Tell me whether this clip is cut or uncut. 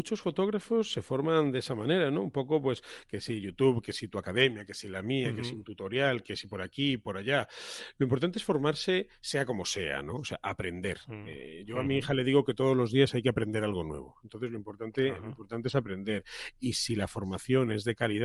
uncut